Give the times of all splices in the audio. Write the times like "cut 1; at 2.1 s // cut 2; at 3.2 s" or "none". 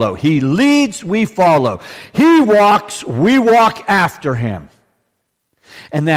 none